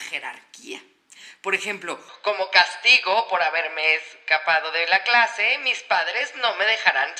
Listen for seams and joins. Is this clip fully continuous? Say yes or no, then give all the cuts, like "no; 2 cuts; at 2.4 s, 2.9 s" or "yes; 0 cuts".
yes; 0 cuts